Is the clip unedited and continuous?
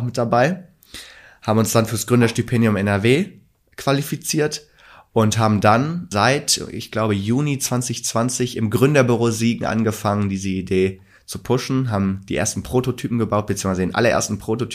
yes; 0 cuts

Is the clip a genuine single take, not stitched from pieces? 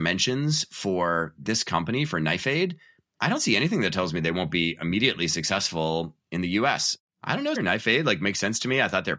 no; 1 cut; at 7.6 s

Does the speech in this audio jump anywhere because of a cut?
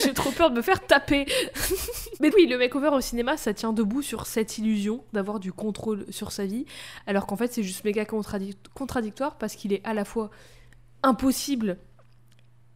yes; 1 cut; at 2.3 s

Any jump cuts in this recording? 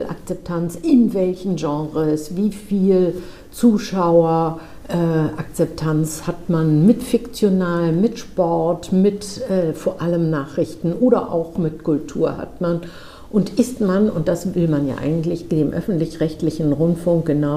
no; 0 cuts

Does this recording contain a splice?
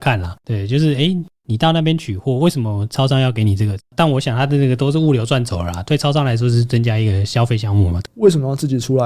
yes; 2 cuts; at 3.8 s, 8.1 s

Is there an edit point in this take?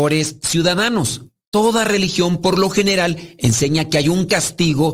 yes; 1 cut; at 1.4 s

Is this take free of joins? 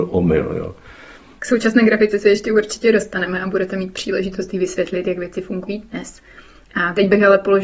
yes; 0 cuts

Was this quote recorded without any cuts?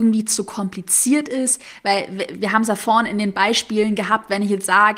yes; 0 cuts

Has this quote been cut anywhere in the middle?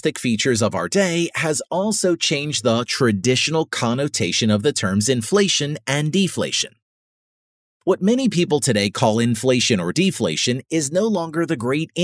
no; 0 cuts

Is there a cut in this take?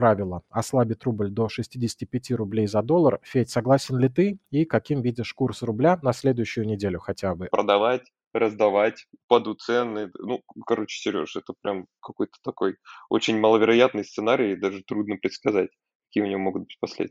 yes; 2 cuts; at 6.0 s, 7.5 s

